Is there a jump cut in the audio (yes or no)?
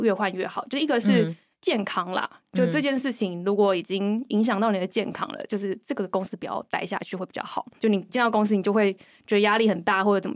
no